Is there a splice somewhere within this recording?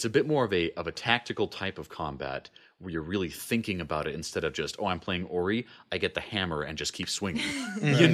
no; 0 cuts

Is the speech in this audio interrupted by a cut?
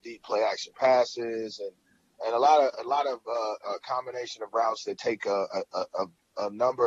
no; 0 cuts

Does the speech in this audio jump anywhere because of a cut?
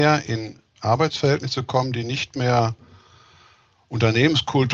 no; 0 cuts

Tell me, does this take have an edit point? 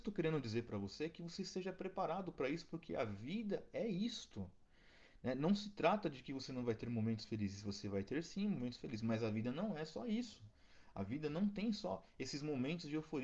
no; 0 cuts

